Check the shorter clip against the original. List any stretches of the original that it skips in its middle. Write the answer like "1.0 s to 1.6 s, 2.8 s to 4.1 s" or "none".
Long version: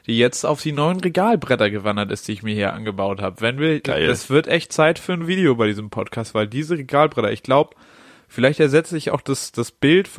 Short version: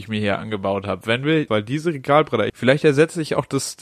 3.8 s to 6.3 s, 7.3 s to 8.3 s